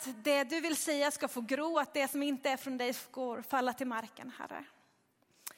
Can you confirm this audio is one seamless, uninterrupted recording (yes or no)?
yes